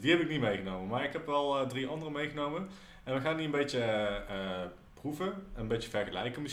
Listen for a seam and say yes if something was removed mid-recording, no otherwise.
no